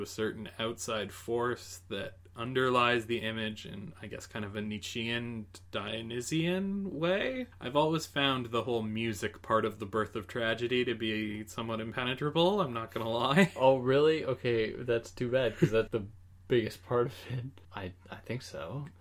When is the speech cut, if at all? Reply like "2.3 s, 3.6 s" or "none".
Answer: 7.5 s, 15.9 s, 17.6 s